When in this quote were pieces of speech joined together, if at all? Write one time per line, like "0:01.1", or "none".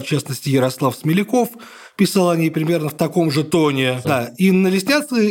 0:04.0